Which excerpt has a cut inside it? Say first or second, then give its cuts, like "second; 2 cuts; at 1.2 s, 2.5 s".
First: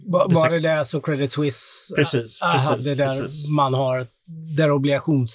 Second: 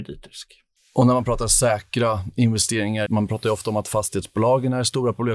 second; 1 cut; at 3.1 s